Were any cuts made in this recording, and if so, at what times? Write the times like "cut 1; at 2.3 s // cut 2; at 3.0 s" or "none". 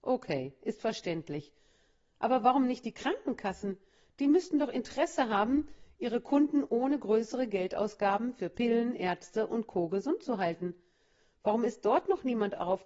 none